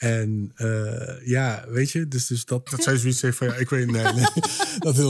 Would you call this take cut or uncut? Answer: cut